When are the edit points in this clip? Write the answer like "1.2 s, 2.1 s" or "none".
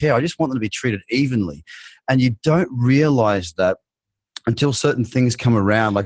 none